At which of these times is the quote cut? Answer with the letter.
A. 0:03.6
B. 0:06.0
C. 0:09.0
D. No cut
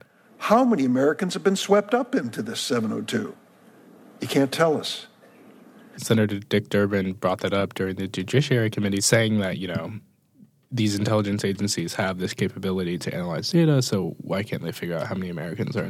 B